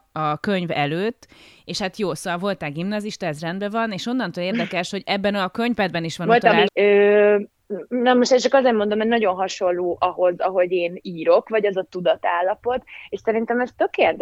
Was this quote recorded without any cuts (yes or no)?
no